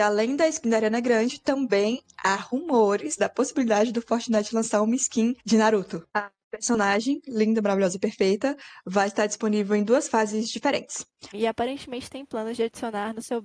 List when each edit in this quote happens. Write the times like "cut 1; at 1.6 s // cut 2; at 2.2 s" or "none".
cut 1; at 6.1 s // cut 2; at 11.3 s